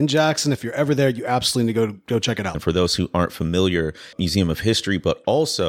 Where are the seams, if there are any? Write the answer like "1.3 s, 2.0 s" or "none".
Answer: 2.5 s, 4.1 s